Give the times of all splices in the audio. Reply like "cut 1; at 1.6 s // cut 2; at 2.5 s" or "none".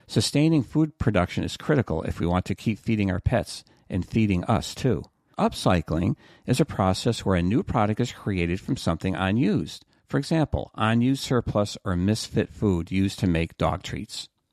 cut 1; at 5.3 s